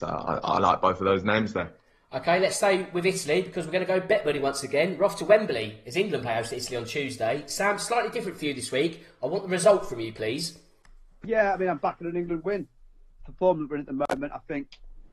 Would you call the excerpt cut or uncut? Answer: cut